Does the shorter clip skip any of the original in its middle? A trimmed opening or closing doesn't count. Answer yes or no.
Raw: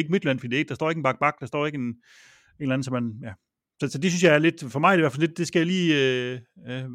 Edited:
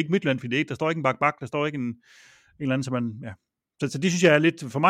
no